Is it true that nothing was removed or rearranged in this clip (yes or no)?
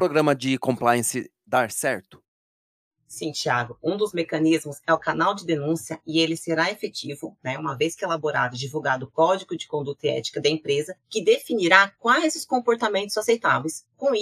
yes